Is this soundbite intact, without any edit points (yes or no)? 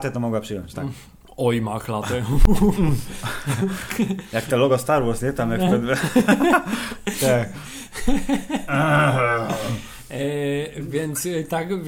yes